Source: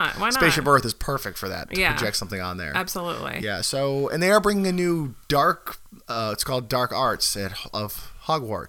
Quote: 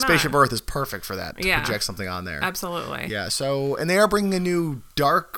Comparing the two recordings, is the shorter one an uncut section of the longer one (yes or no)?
yes